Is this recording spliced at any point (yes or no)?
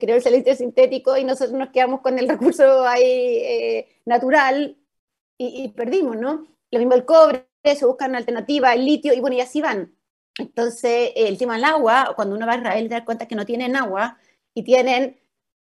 no